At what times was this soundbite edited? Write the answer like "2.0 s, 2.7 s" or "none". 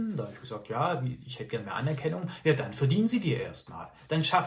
none

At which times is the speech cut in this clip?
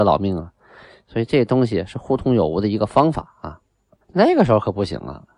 4.0 s

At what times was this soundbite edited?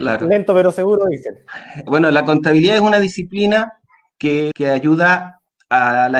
1.9 s, 4.5 s

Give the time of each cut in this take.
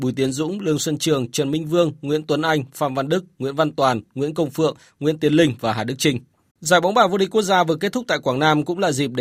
6.5 s

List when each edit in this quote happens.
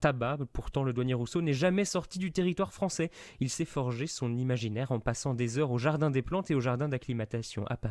none

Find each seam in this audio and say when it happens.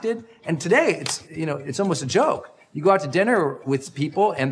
1.2 s

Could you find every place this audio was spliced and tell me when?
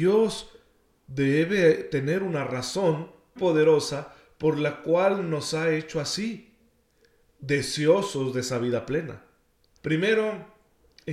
3.4 s, 9.7 s

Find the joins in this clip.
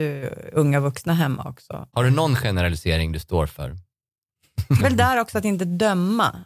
1.9 s, 4.8 s

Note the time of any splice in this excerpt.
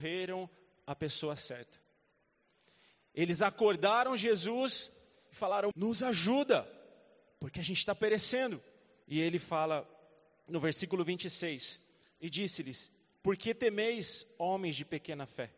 5.7 s, 9.0 s

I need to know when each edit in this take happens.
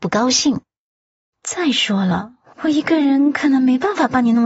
1.3 s

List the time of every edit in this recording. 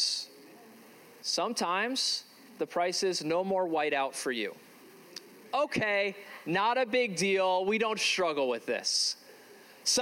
none

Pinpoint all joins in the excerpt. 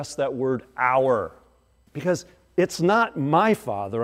1.9 s

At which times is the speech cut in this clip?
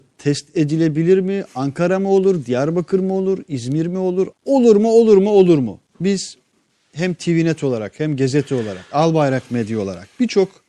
4.3 s, 5.9 s

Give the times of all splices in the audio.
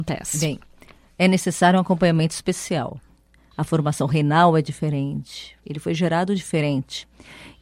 3.5 s, 5.6 s

